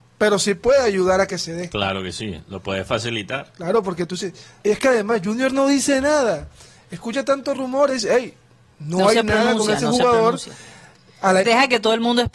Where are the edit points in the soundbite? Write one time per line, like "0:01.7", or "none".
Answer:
0:04.6
0:11.4